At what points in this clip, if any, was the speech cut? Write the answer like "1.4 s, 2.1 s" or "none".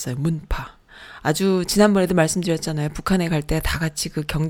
none